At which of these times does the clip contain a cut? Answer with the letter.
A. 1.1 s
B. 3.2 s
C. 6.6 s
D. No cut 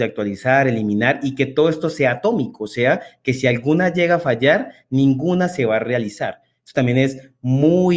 D